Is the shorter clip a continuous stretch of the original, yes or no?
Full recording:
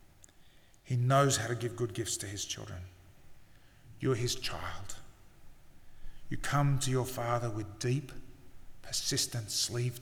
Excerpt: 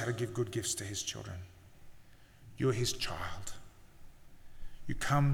yes